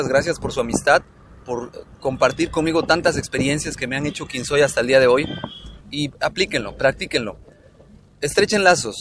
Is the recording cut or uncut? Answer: cut